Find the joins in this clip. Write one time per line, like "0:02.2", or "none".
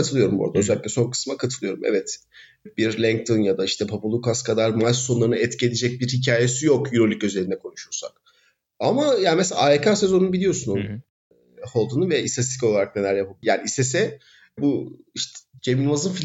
0:13.4